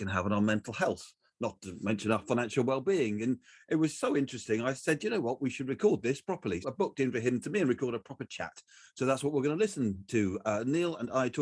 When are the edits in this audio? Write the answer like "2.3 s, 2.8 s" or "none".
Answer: 6.6 s